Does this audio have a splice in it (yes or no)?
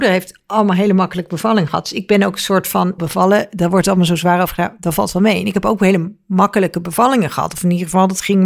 yes